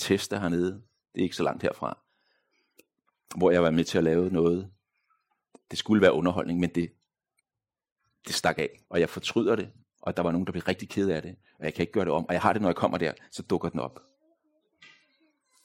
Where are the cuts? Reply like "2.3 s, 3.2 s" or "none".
8.8 s

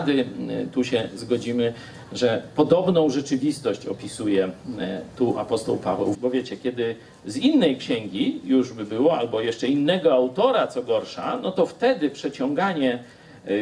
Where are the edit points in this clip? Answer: 6.1 s

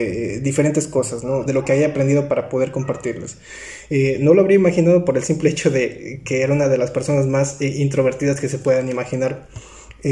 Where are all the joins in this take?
1.5 s

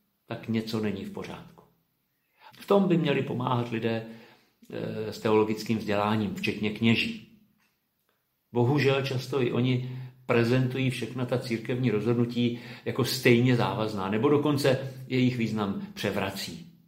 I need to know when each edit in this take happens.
2.5 s

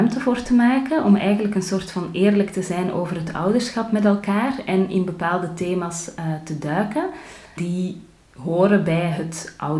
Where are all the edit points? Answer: 7.6 s

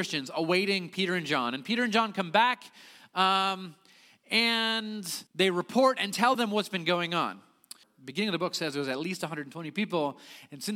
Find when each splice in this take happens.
5.3 s, 7.8 s

